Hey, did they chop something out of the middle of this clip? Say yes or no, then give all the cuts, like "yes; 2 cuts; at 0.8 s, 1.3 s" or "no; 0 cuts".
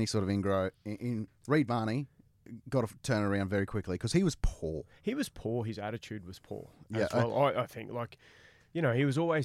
yes; 1 cut; at 1.3 s